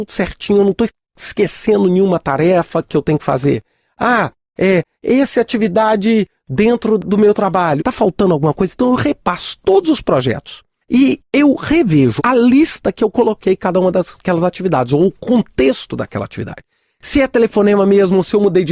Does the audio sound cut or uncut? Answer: cut